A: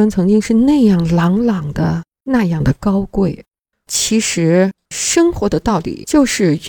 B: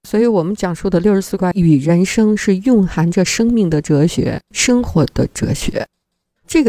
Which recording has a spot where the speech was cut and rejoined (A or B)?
A